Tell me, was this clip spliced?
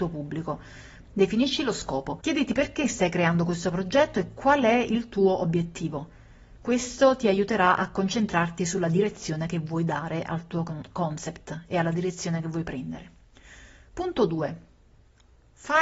yes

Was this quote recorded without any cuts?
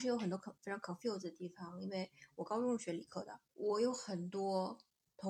no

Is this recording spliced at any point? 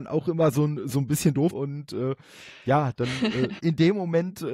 yes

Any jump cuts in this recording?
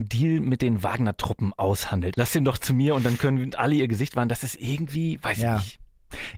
yes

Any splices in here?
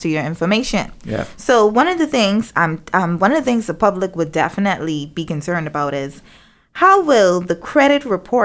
no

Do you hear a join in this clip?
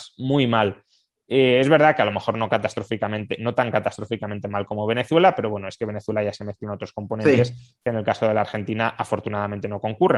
no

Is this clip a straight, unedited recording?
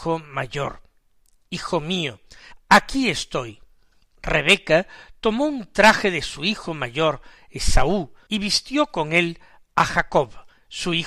no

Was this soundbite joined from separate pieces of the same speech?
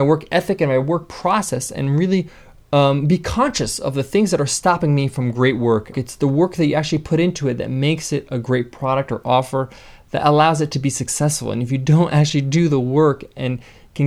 yes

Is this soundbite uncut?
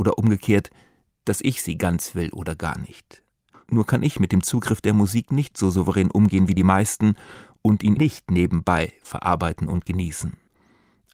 no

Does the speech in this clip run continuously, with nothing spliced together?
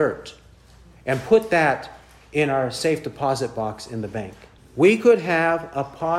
no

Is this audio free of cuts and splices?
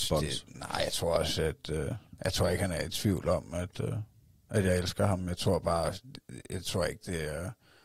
yes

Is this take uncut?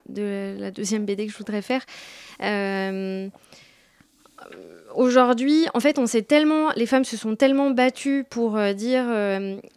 yes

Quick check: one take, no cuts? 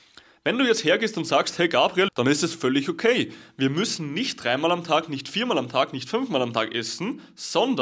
no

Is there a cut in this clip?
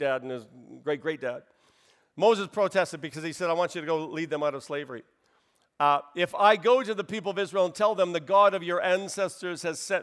no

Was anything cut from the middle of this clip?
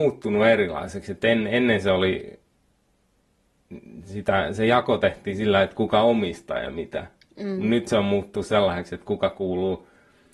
no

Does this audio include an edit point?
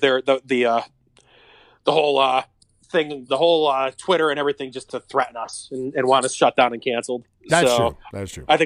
yes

